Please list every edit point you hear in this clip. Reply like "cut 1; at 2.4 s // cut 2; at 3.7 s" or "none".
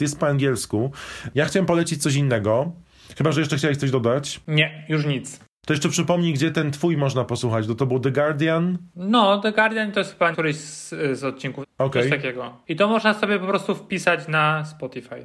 cut 1; at 1.3 s // cut 2; at 10.3 s // cut 3; at 11.6 s